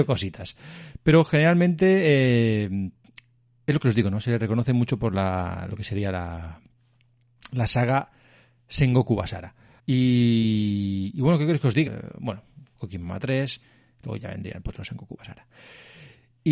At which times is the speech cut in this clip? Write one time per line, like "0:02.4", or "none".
0:09.8
0:11.9